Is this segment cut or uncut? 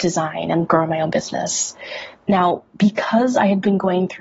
cut